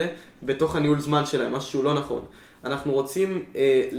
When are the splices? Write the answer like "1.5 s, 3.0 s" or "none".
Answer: none

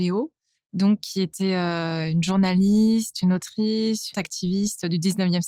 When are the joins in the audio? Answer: 4.1 s

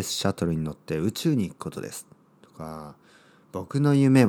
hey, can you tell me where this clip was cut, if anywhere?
none

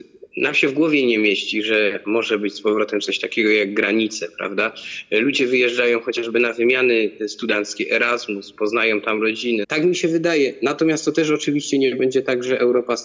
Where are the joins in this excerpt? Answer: 9.6 s

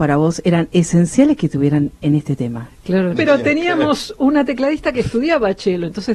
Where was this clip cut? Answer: 3.1 s

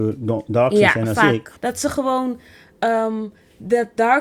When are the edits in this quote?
1.6 s

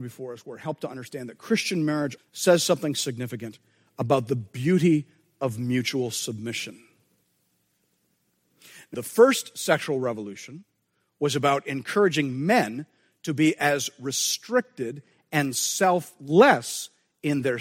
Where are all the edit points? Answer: 2.2 s, 8.9 s

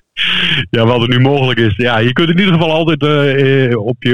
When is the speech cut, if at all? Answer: none

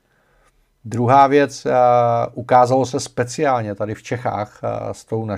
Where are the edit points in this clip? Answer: none

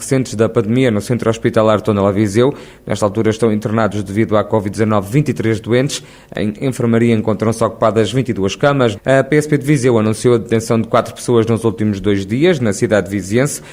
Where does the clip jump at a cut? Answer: 8.9 s

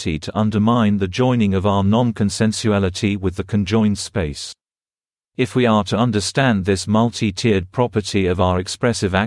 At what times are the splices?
5.2 s

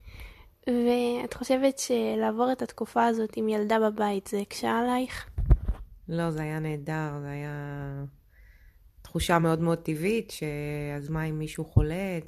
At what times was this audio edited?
none

